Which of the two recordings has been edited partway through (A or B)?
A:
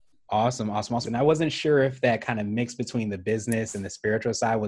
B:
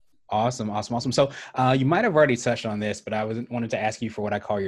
A